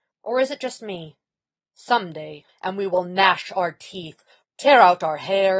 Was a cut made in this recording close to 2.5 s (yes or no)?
yes